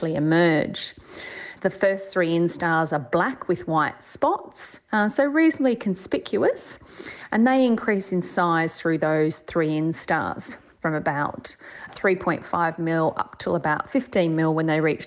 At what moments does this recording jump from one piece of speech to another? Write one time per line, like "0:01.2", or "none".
0:01.6